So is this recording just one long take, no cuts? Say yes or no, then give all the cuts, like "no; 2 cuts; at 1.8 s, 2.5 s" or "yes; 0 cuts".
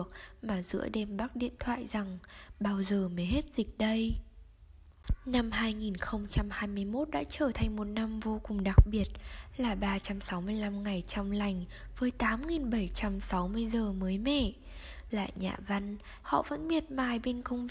no; 2 cuts; at 15.1 s, 16.2 s